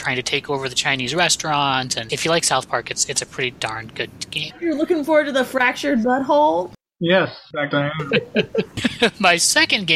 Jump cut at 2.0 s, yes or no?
no